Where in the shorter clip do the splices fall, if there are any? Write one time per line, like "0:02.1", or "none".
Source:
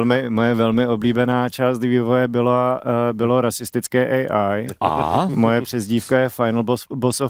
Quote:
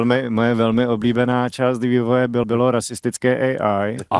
0:02.4